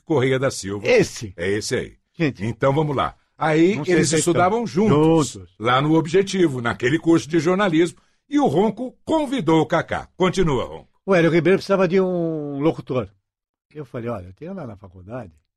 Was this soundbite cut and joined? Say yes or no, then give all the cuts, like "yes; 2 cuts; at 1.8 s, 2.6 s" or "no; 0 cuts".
no; 0 cuts